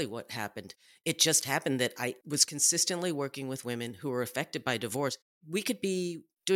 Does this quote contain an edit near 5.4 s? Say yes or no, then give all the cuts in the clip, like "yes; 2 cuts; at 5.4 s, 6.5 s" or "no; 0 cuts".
no; 0 cuts